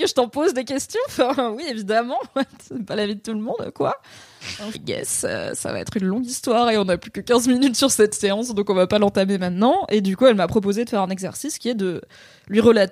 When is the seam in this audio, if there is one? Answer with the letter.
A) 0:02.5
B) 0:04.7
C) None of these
B